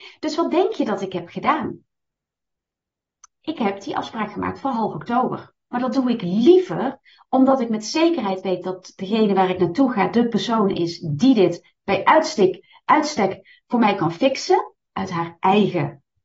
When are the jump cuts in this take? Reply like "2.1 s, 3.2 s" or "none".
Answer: 5.7 s, 14.8 s